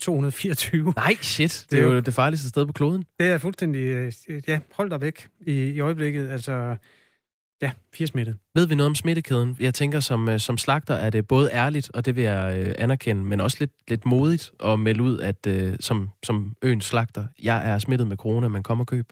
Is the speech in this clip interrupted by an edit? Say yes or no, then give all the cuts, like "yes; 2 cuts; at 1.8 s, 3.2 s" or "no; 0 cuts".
no; 0 cuts